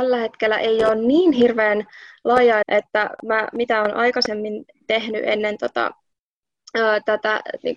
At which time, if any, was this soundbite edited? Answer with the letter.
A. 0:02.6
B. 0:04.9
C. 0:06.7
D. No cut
A